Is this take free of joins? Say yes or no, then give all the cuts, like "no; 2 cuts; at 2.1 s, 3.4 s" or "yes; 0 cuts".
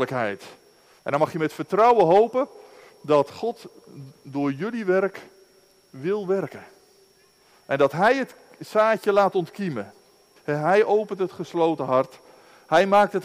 no; 2 cuts; at 1.0 s, 10.4 s